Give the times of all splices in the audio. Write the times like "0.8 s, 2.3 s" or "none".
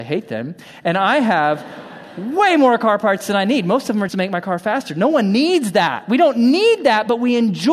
4.1 s